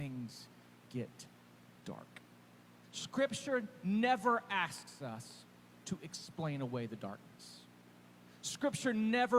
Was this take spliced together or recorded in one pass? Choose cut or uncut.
cut